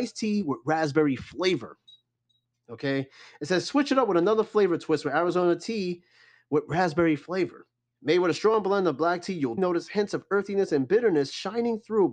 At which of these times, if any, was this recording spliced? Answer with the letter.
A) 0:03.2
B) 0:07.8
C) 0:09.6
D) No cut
C